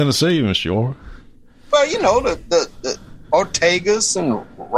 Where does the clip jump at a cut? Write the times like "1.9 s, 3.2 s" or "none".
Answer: none